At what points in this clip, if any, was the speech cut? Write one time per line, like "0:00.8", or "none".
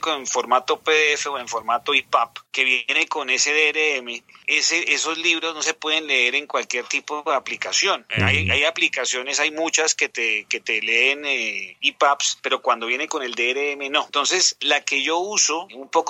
0:02.5